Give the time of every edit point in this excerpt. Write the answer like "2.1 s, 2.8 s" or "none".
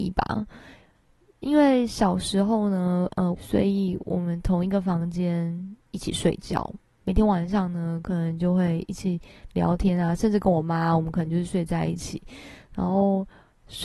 3.3 s